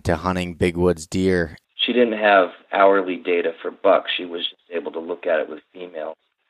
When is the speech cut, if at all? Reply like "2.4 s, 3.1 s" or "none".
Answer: 1.6 s